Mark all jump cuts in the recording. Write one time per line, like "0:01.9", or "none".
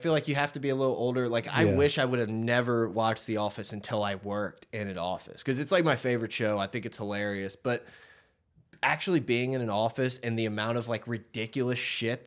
none